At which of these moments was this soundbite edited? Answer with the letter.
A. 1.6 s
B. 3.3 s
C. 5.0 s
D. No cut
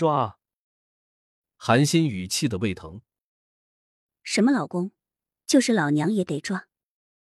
D